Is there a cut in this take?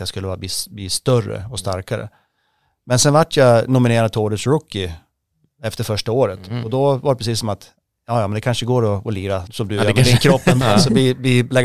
yes; 2 cuts; at 9.5 s, 10.6 s

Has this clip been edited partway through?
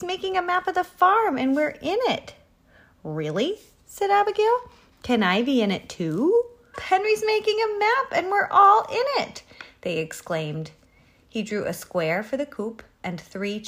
yes; 1 cut; at 6.7 s

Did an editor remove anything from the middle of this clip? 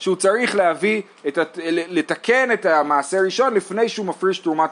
no; 0 cuts

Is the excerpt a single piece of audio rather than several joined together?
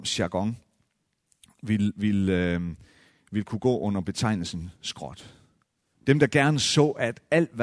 no; 1 cut; at 5.9 s

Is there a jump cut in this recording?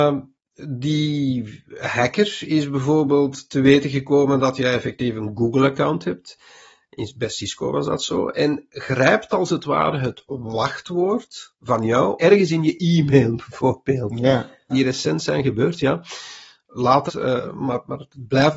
yes; 3 cuts; at 12.2 s, 14.7 s, 17.1 s

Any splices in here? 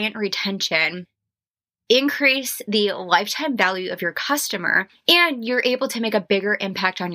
no; 0 cuts

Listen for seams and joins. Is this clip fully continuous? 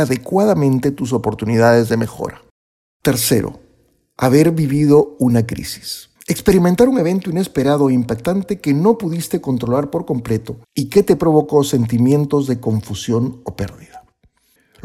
no; 2 cuts; at 6.2 s, 10.6 s

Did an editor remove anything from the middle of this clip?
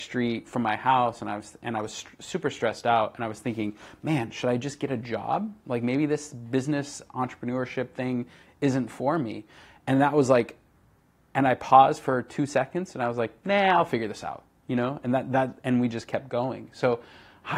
no; 0 cuts

